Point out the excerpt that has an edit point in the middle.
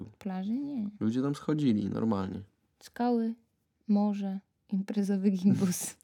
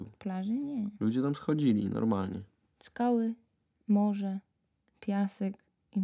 first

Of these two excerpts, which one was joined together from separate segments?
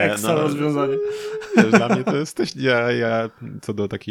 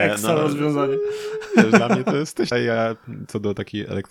second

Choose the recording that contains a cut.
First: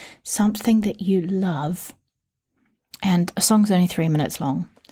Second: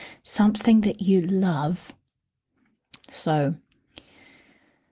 second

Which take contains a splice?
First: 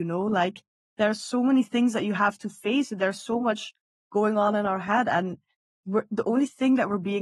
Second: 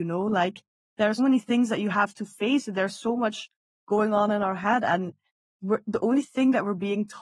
second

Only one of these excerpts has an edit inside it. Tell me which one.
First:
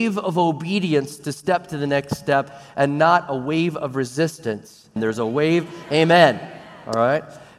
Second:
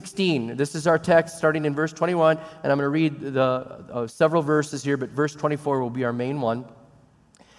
first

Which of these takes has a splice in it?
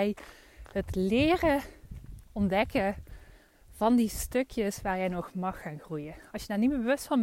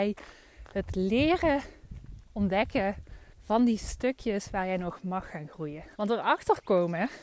second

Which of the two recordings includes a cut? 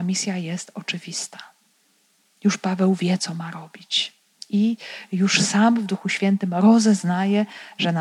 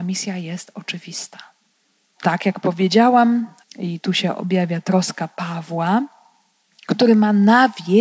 second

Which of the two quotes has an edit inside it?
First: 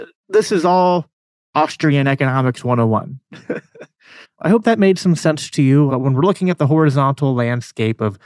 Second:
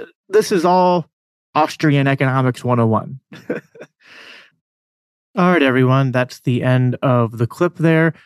first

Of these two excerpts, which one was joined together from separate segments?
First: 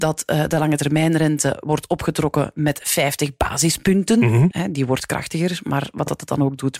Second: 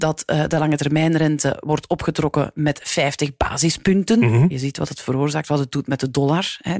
first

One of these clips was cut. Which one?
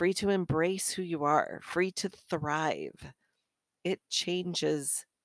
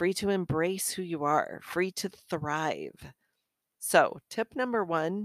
second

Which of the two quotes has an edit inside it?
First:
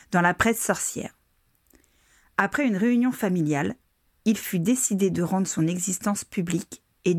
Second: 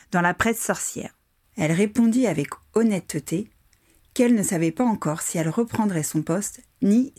second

